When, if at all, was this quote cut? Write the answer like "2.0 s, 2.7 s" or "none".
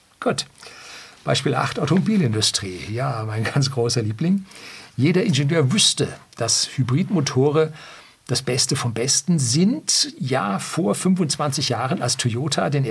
none